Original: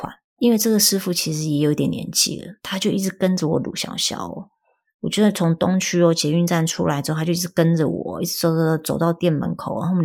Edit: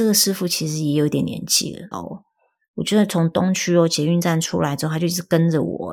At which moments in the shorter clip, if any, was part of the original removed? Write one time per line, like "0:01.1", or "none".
0:01.9